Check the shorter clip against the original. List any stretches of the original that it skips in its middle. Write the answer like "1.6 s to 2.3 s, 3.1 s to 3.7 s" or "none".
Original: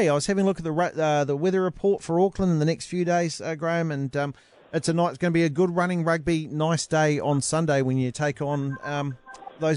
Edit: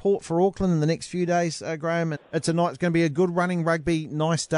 3.9 s to 4.5 s